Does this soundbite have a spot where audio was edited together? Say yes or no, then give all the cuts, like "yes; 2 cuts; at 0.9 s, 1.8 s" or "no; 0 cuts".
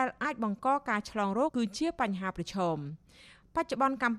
yes; 1 cut; at 1.5 s